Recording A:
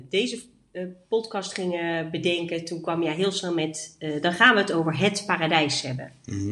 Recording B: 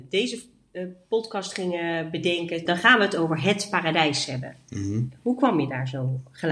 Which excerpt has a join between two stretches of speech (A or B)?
B